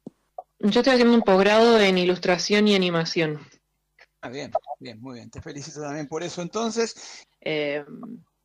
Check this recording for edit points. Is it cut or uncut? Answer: cut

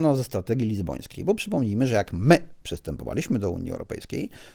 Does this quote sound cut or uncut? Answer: uncut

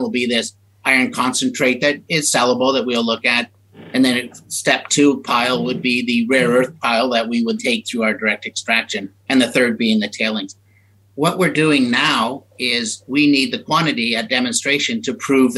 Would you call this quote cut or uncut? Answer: cut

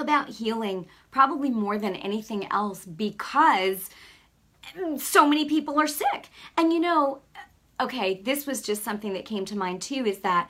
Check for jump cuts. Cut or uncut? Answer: uncut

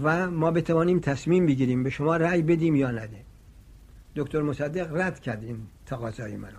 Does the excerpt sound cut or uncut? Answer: uncut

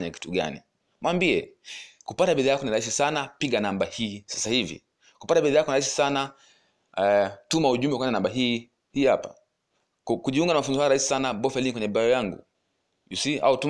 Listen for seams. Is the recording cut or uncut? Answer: uncut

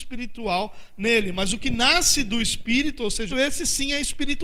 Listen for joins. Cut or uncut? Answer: cut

